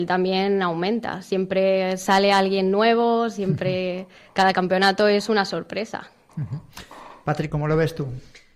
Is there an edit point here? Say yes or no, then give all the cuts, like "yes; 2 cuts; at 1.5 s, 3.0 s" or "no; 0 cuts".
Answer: no; 0 cuts